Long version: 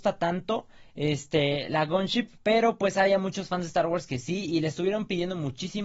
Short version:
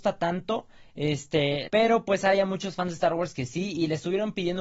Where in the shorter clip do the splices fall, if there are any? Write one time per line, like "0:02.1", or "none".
0:01.7